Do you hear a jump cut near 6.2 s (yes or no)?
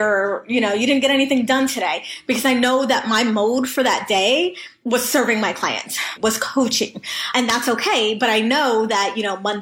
yes